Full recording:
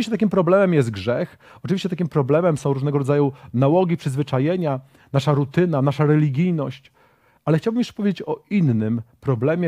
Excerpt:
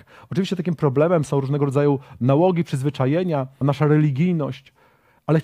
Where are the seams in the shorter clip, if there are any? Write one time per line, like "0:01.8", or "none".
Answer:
0:03.6